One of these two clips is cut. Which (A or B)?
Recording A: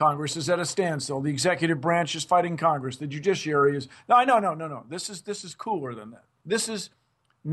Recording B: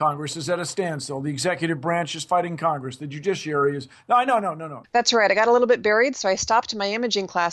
B